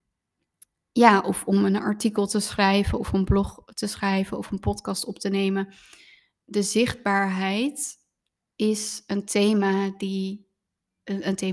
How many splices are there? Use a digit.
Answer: 0